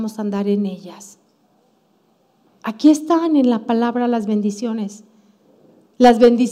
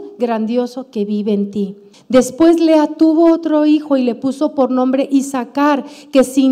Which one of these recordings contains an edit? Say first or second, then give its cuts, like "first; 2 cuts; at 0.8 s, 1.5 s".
second; 1 cut; at 1.9 s